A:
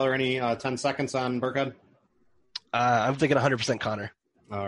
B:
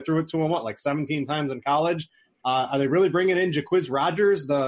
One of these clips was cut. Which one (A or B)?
A